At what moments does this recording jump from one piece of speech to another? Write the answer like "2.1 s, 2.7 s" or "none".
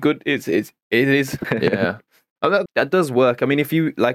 1.4 s, 2.7 s